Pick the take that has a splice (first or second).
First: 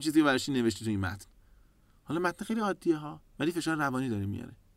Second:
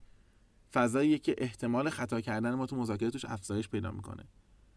first